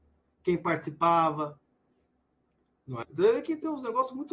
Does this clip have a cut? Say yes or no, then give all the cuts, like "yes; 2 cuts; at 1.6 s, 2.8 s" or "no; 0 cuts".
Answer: yes; 1 cut; at 3.0 s